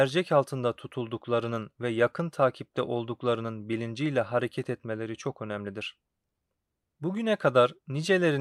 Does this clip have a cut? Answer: no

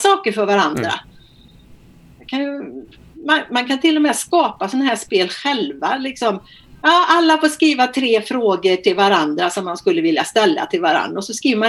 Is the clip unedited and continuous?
yes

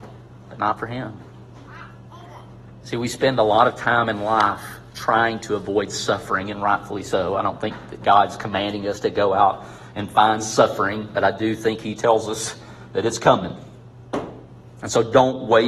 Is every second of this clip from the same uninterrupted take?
yes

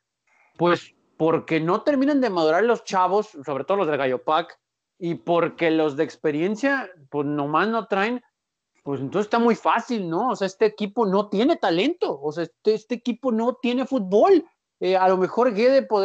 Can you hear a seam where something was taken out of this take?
no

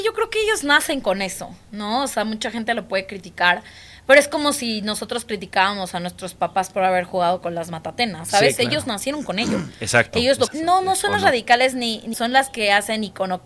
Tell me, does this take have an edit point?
yes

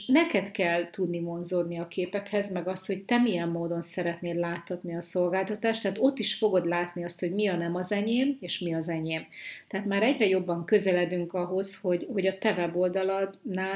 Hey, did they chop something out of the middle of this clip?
no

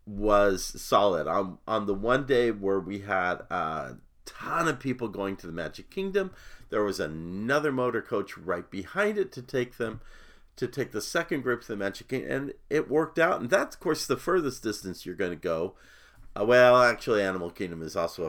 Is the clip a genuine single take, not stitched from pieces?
yes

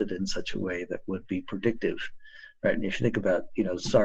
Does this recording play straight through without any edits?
yes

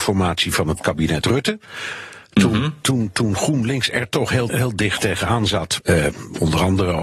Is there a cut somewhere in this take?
yes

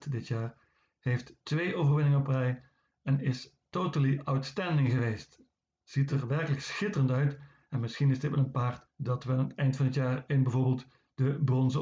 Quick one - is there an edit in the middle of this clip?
no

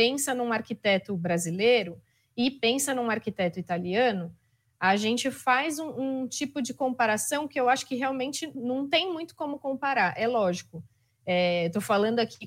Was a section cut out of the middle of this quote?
yes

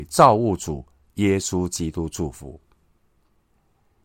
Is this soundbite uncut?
yes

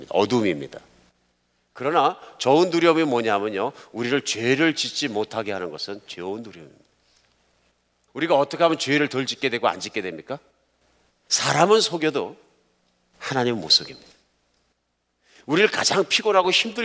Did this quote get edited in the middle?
yes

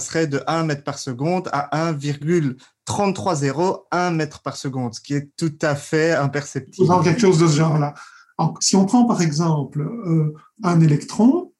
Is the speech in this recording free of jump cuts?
no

